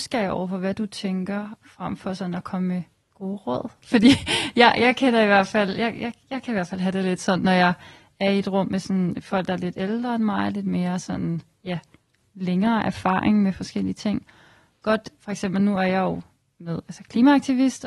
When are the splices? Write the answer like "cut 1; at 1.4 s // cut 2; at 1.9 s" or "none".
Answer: none